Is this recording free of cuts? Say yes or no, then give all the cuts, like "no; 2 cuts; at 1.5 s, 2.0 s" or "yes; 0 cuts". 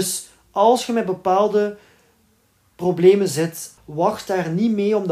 no; 1 cut; at 3.8 s